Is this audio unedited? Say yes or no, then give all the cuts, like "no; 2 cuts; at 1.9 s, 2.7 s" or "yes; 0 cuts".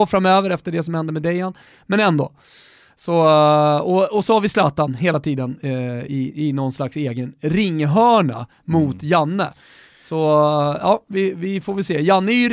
yes; 0 cuts